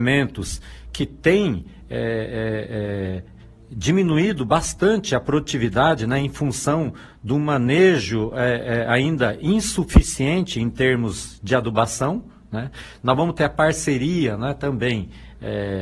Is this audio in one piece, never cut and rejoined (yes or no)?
yes